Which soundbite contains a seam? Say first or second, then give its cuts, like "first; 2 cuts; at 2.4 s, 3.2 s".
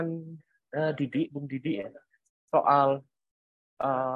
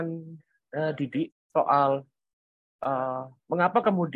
second; 1 cut; at 1.3 s